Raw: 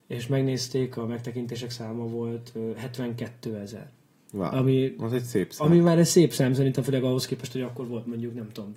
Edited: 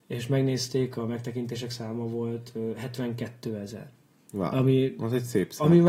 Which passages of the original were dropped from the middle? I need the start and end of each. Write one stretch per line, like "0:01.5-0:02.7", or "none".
none